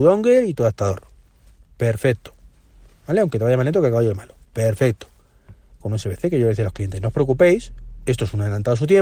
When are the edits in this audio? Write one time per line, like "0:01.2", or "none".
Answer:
0:04.5
0:05.8